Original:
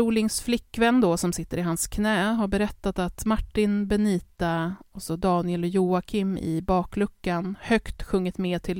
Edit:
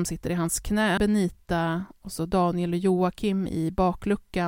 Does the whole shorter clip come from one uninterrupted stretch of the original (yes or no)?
no